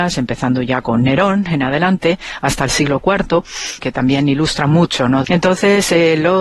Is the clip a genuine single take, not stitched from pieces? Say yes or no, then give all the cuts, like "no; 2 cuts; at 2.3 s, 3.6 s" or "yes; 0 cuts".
no; 2 cuts; at 3.8 s, 5.2 s